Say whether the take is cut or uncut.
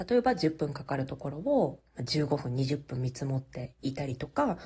uncut